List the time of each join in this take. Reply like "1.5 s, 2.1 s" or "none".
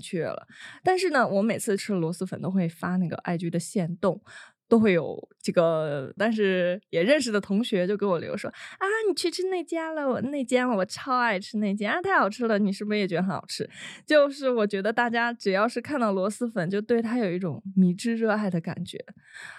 6.2 s